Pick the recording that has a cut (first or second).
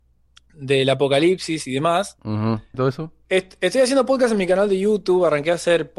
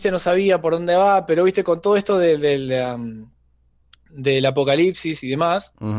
first